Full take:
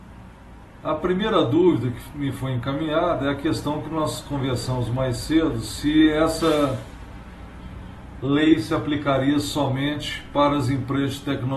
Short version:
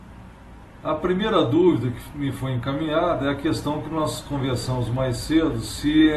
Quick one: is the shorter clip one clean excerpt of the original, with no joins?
yes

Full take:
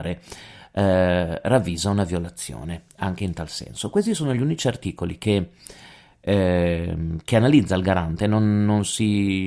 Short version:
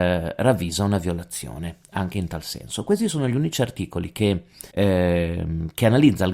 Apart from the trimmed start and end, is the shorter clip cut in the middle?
yes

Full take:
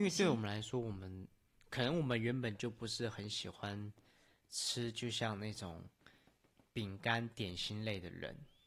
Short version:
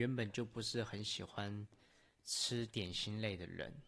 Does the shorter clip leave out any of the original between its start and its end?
yes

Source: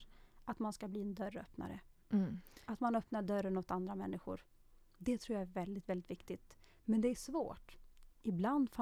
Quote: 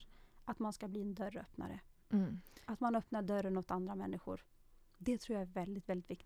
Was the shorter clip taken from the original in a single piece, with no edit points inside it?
yes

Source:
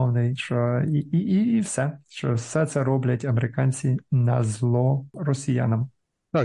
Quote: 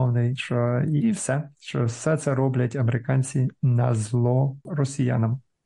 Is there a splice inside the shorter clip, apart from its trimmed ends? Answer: yes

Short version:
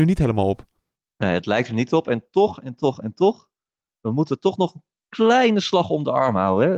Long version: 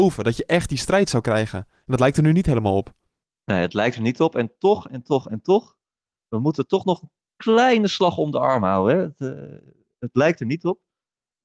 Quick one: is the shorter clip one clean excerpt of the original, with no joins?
yes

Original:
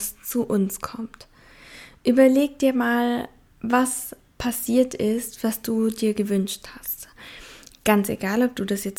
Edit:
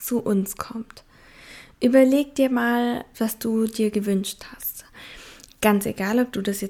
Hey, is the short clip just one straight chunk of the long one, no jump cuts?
no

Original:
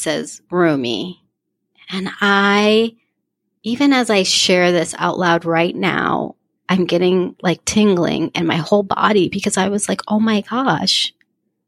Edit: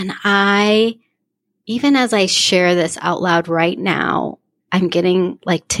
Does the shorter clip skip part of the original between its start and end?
no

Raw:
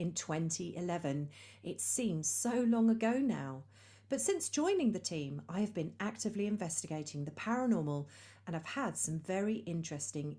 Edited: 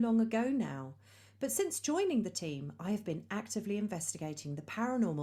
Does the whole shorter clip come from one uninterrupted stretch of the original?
yes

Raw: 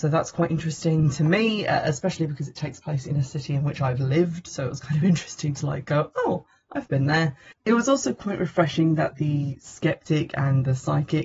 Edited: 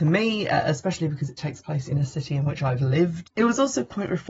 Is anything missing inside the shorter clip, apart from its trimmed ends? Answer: yes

